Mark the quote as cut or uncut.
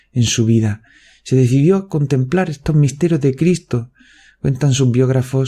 uncut